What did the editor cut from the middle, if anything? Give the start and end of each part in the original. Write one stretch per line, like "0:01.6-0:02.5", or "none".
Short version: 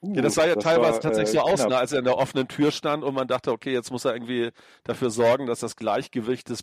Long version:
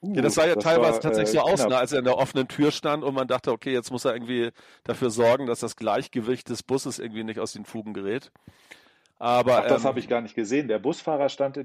none